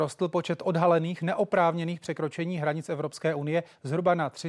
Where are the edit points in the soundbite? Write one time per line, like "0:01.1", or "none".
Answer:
none